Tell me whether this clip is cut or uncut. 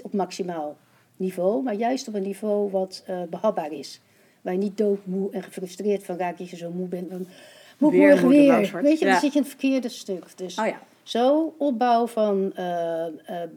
uncut